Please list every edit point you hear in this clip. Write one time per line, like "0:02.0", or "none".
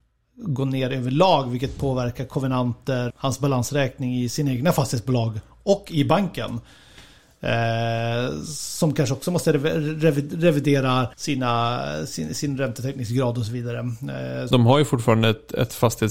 0:03.1
0:11.1
0:14.5

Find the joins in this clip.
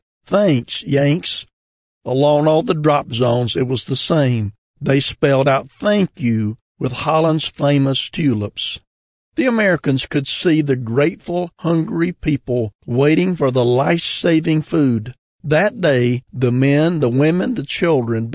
0:15.3

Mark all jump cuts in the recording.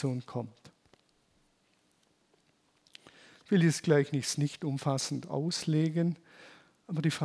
none

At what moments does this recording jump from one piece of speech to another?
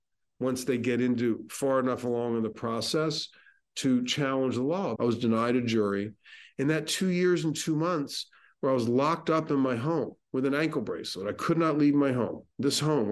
0:05.0

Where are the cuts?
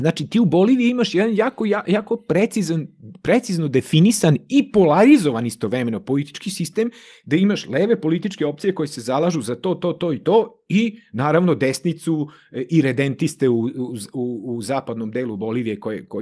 none

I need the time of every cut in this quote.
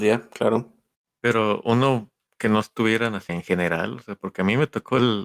0:03.3

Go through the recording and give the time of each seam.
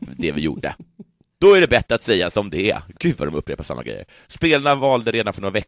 0:01.3

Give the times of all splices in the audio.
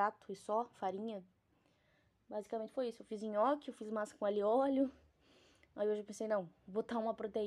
none

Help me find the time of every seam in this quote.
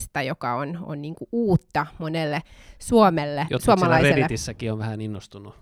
none

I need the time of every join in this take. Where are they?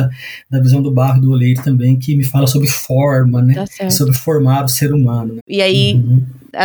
0:05.4

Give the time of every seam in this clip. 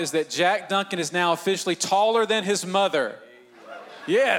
none

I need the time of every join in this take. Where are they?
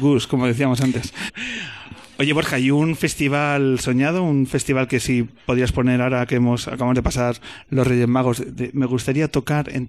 0:01.3

